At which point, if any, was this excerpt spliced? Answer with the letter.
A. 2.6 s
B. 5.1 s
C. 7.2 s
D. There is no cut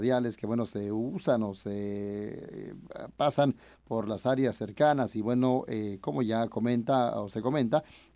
D